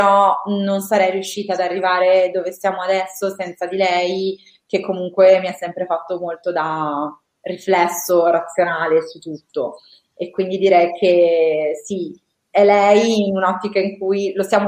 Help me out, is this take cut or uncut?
uncut